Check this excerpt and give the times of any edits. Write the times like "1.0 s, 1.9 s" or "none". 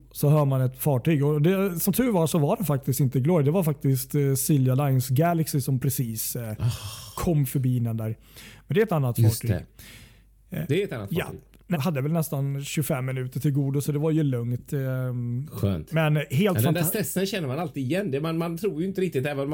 11.7 s